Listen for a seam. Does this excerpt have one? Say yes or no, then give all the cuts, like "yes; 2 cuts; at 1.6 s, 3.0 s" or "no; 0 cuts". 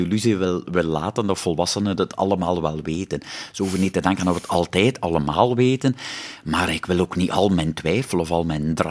no; 0 cuts